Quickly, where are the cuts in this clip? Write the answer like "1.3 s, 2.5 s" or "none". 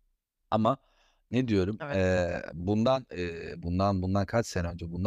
none